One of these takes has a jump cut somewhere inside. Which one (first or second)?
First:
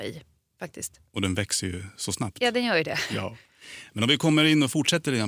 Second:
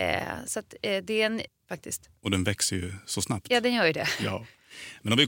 second